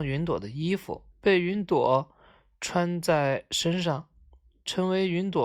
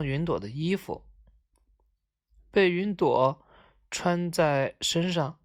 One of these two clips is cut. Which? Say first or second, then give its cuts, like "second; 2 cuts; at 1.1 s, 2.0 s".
first; 1 cut; at 1.1 s